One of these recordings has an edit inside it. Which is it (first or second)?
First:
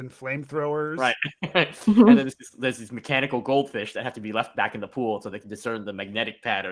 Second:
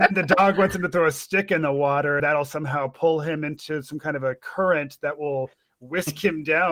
second